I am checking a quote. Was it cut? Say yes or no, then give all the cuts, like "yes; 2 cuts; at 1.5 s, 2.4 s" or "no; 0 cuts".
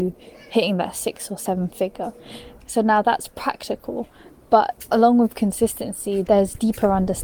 no; 0 cuts